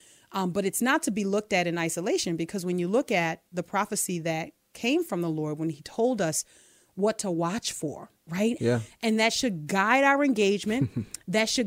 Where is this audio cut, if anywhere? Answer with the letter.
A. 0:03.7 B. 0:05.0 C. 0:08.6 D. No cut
C